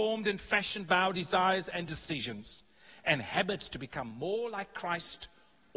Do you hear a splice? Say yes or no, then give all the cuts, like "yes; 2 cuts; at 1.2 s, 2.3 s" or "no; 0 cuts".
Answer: no; 0 cuts